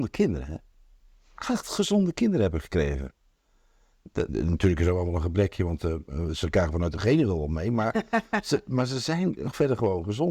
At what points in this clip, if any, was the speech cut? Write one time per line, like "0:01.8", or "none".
0:04.3